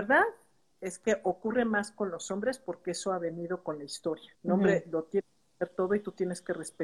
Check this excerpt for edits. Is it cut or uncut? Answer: cut